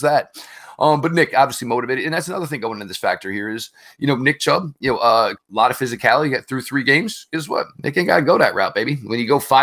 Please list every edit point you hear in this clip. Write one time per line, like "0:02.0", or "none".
0:05.3
0:07.7